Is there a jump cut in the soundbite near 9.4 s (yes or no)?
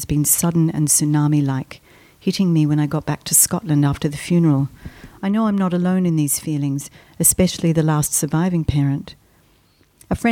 no